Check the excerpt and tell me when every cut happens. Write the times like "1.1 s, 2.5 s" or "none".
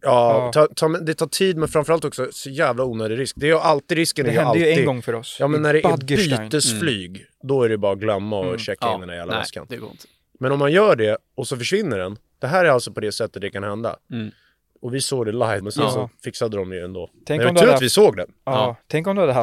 15.6 s